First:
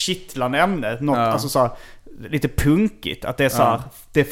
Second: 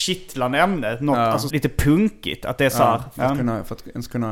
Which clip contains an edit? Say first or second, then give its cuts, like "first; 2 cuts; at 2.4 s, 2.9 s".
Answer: second; 2 cuts; at 1.5 s, 3.2 s